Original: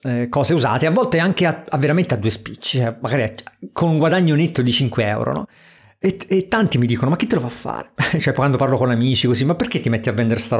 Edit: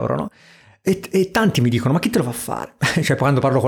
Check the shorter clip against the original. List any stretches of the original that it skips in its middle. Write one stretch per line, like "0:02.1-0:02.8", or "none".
none